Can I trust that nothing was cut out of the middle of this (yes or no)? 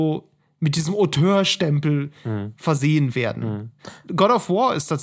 yes